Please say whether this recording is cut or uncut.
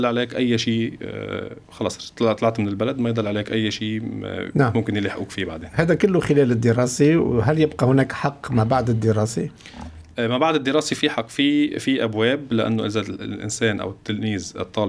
uncut